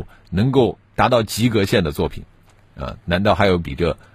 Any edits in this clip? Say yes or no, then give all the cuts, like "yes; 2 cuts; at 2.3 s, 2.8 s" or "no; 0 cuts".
no; 0 cuts